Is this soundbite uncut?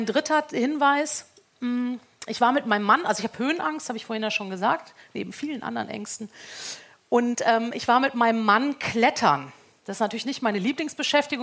yes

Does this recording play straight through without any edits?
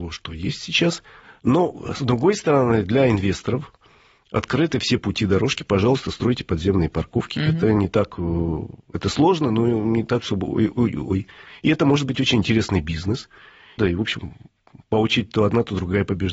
no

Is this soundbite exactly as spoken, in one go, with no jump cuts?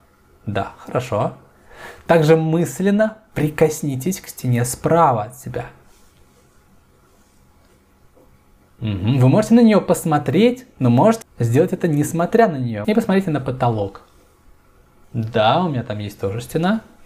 no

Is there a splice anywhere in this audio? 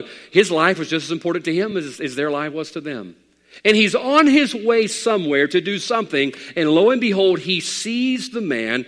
no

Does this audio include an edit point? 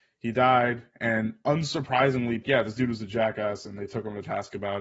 yes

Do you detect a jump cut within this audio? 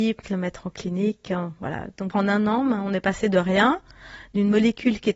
no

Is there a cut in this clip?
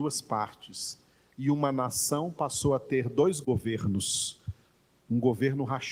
no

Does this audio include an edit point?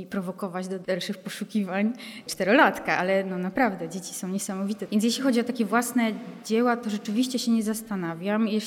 no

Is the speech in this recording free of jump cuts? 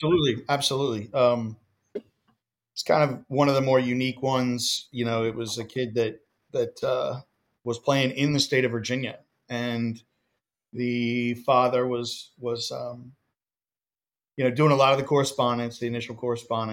yes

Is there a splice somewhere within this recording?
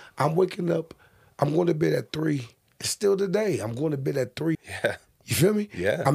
yes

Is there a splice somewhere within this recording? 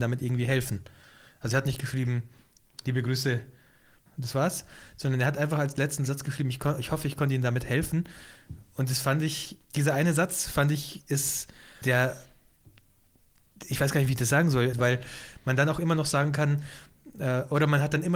yes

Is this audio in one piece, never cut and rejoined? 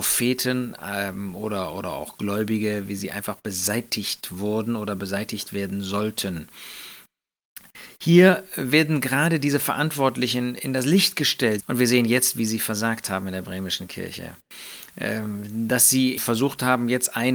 no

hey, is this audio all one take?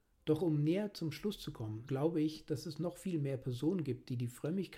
no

